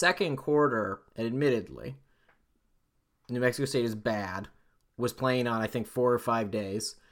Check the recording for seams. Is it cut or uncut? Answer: uncut